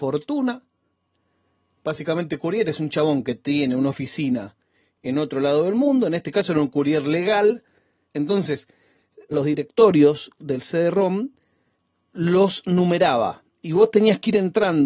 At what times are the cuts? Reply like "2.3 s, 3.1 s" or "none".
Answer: 8.1 s, 9.3 s